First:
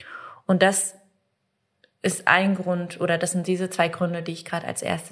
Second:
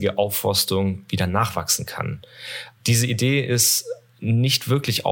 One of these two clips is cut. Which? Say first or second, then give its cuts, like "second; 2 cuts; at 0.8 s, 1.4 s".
second; 1 cut; at 2.7 s